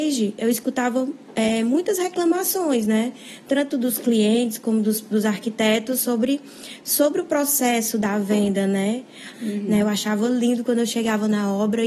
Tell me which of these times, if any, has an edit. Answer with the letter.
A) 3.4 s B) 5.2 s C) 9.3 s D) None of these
C